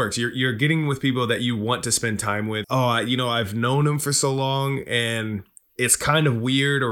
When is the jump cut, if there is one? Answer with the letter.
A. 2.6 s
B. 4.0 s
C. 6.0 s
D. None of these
A